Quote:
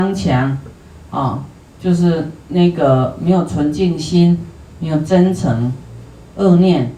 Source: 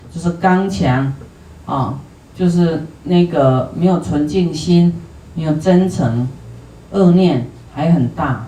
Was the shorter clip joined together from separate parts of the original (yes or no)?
no